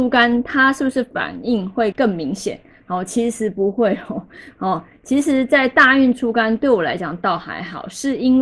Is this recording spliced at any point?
yes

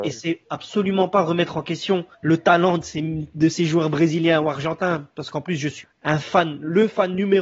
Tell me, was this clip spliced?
yes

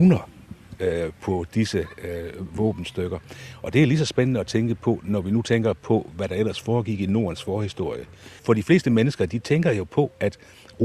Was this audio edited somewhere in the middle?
no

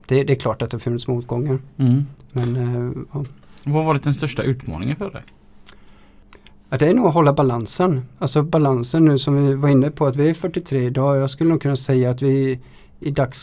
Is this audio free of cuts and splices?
yes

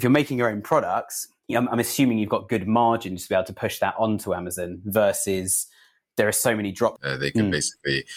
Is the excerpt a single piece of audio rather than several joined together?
no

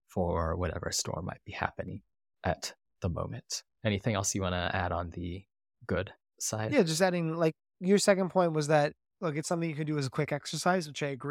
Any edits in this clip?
no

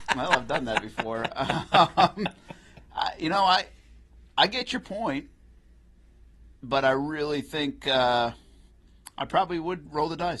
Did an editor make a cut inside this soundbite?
no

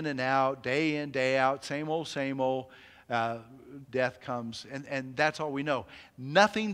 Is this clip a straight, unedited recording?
no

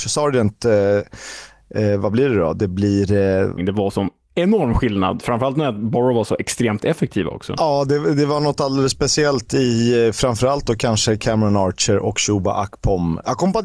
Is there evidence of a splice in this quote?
yes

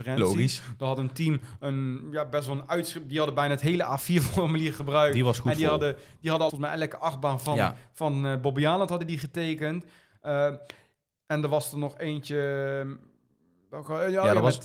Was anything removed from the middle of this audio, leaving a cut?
yes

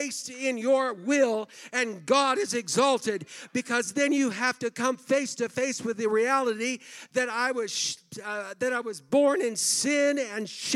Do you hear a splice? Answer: no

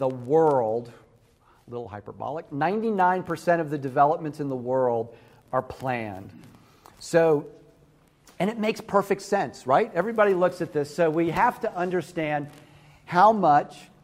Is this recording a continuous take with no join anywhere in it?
yes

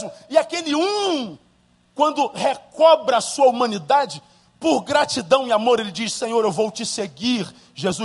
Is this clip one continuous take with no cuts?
yes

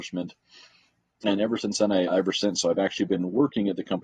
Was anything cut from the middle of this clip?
yes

